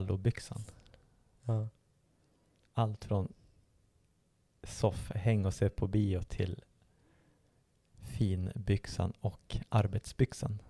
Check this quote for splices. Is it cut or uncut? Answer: uncut